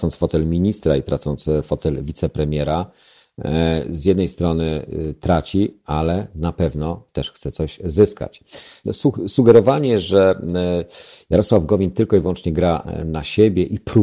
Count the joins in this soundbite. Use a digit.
1